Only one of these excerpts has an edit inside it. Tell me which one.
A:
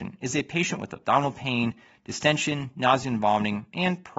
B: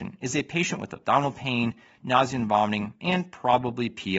B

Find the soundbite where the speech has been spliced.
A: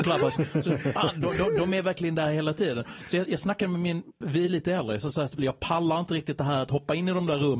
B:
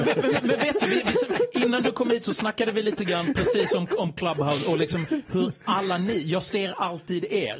A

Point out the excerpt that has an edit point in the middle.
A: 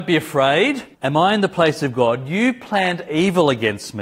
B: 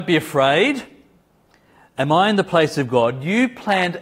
A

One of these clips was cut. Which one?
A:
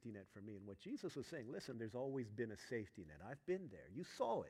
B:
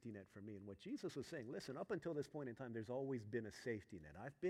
A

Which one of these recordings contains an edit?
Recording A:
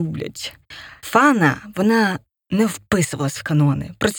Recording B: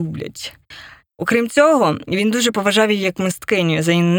A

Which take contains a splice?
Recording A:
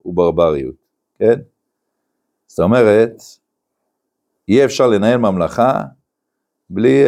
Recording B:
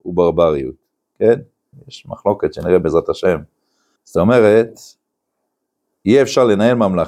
B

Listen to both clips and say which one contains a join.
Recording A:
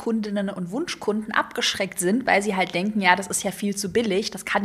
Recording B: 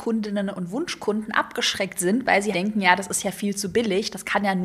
B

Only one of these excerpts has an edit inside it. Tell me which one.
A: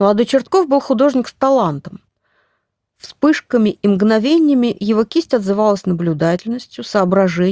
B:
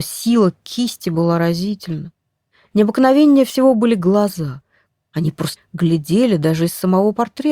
B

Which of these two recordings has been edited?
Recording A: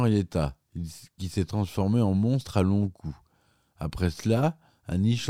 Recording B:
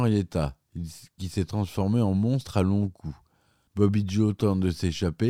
B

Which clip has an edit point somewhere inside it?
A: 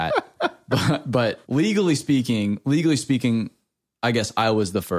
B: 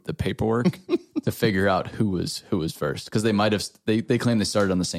A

